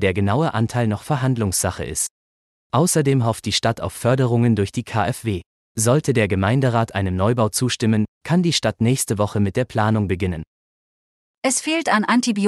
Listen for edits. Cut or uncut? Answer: uncut